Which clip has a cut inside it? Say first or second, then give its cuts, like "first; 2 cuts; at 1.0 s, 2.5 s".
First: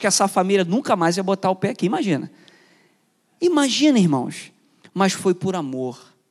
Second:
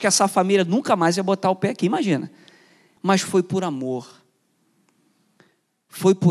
second; 1 cut; at 3.0 s